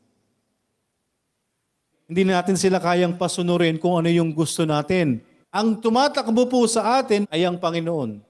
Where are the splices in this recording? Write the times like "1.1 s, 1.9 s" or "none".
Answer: 1.9 s, 5.4 s, 7.2 s